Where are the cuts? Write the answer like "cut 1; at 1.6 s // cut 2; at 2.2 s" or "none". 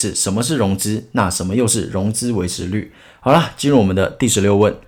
none